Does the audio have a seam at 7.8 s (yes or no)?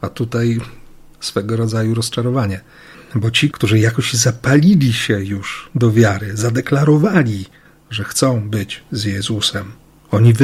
no